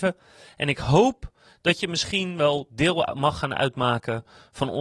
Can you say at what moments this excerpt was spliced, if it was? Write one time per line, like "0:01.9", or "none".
none